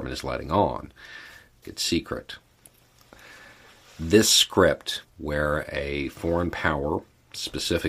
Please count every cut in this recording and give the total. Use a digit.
2